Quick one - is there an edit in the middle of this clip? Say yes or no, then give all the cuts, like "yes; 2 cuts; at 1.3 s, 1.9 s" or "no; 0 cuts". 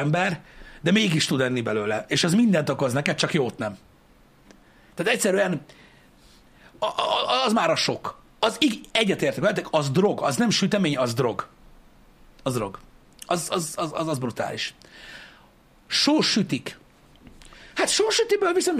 no; 0 cuts